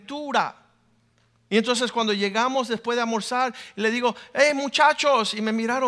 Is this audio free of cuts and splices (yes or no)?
yes